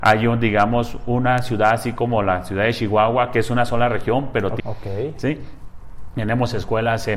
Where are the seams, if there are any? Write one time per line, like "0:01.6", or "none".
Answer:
0:04.6